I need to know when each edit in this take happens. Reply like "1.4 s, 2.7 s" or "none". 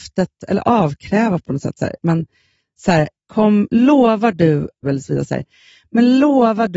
2.0 s, 3.2 s, 4.8 s